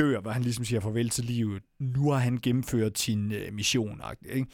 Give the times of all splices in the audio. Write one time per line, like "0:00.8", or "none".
0:01.7